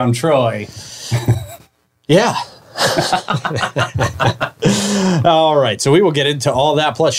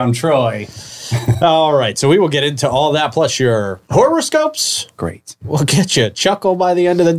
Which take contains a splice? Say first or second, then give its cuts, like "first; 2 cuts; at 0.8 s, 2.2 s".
second; 2 cuts; at 1.4 s, 3.8 s